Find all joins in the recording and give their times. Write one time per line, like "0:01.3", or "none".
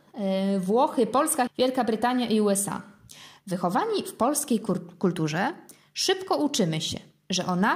0:01.5
0:03.4